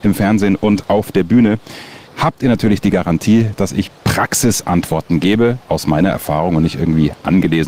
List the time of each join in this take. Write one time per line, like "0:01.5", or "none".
0:02.1
0:03.9